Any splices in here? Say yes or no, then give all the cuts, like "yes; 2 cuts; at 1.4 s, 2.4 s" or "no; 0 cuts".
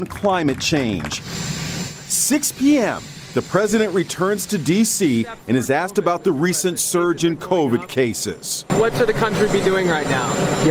no; 0 cuts